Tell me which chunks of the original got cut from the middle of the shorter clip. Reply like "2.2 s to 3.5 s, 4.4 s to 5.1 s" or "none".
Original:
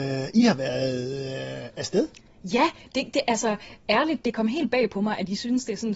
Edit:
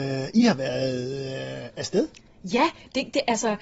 none

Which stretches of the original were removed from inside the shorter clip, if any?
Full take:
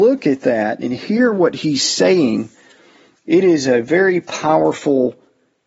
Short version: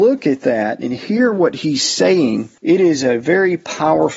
2.6 s to 3.2 s

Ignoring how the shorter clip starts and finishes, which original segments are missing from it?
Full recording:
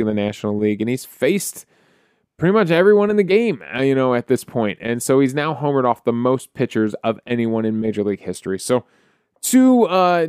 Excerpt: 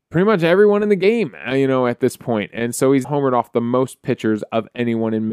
5.3 s to 5.6 s

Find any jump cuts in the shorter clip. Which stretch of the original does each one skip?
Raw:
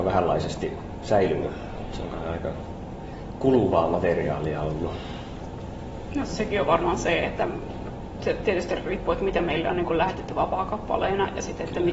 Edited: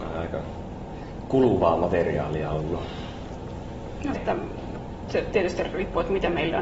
6.3 s to 7.3 s

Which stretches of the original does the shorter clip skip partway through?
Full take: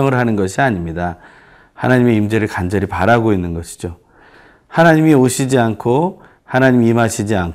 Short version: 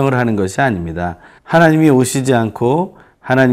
1.4 s to 4.6 s

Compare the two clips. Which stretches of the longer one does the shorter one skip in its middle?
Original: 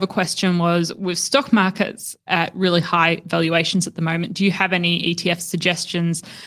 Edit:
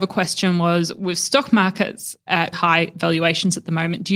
2.5 s to 2.8 s

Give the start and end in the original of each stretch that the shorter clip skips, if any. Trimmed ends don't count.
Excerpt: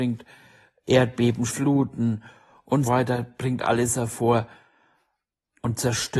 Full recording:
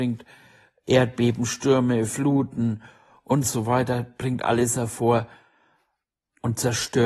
1.5 s to 2.1 s, 3.4 s to 3.6 s

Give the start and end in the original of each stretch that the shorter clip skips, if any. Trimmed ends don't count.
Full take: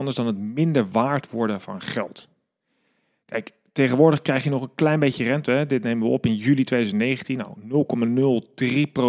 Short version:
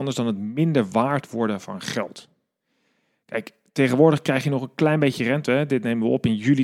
none

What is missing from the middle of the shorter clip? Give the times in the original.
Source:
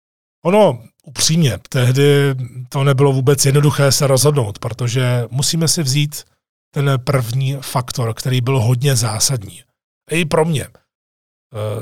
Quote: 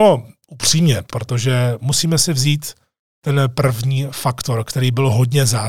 1.7 s to 4.6 s

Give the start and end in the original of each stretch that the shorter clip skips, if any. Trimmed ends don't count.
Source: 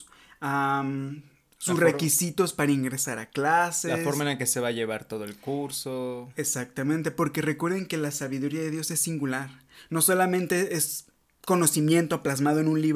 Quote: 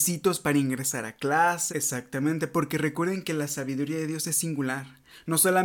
3.8 s to 6.3 s

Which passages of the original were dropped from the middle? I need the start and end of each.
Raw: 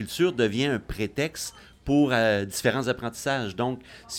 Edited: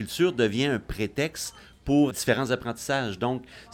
2.1 s to 2.5 s

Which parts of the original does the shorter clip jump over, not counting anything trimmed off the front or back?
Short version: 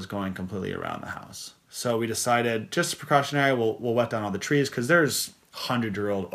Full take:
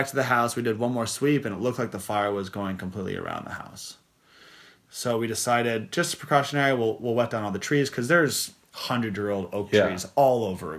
4.1 s to 4.8 s

